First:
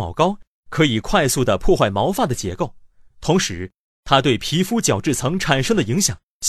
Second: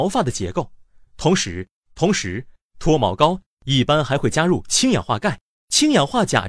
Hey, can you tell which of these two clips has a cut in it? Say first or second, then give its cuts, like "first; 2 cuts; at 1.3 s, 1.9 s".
second; 1 cut; at 1.8 s